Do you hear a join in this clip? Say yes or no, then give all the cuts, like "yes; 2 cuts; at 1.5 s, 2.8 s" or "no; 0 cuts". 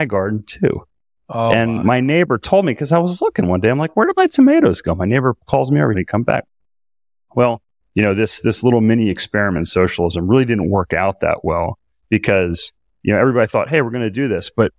yes; 2 cuts; at 5.9 s, 7.8 s